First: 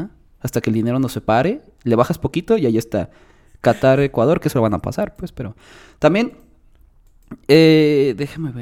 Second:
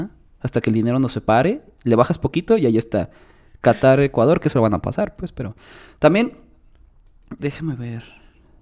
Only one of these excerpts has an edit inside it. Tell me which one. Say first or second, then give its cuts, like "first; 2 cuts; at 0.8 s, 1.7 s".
second; 1 cut; at 7.4 s